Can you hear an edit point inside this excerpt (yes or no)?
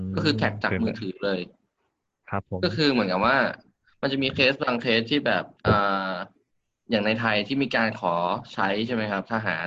yes